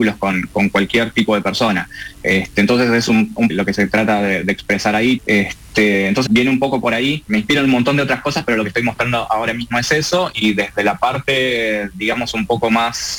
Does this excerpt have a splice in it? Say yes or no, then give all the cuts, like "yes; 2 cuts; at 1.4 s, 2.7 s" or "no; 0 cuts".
yes; 3 cuts; at 3.5 s, 5.2 s, 6.3 s